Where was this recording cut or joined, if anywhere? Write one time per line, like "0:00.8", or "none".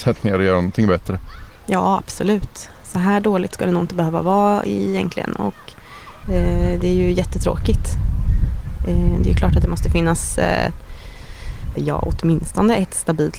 0:01.6
0:06.2
0:11.8